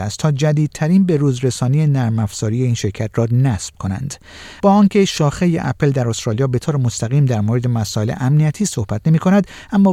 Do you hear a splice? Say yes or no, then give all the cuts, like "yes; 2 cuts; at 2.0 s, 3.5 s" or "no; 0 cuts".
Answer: yes; 1 cut; at 4.6 s